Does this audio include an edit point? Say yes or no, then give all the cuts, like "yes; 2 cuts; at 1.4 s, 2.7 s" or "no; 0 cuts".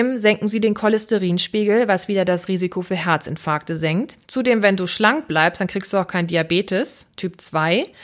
yes; 1 cut; at 4.2 s